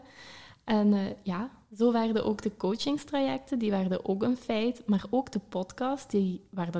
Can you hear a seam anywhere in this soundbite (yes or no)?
no